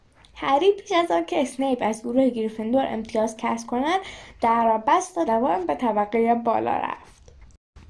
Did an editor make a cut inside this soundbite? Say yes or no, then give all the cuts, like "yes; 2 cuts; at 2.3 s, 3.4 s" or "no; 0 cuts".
yes; 1 cut; at 5.3 s